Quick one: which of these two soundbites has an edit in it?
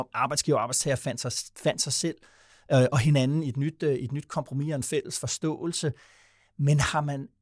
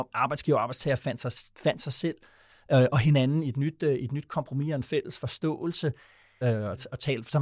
second; 1 cut; at 6.4 s

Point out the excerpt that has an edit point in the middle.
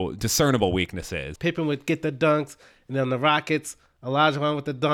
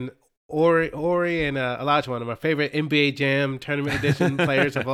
first; 1 cut; at 1.4 s

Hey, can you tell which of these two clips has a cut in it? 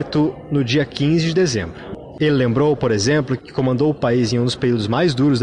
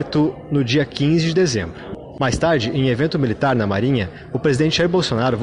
first; 2 cuts; at 2.2 s, 3.4 s

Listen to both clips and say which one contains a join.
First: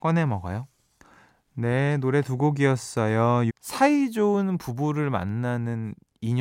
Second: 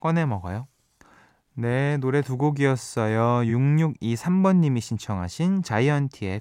first; 1 cut; at 3.5 s

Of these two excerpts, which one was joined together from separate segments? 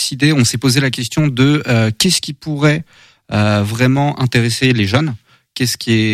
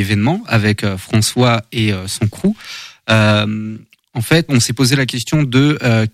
second; 1 cut; at 4.5 s

